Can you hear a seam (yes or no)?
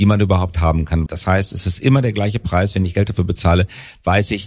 yes